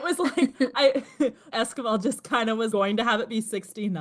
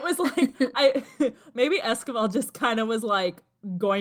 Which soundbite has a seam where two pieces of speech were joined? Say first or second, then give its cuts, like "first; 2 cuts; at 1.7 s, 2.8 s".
first; 2 cuts; at 1.5 s, 2.7 s